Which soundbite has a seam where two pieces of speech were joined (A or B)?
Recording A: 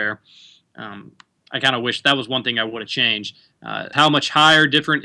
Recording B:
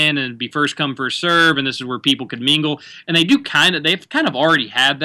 A